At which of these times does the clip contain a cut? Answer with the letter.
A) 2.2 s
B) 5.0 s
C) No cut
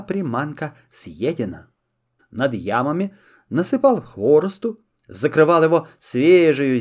A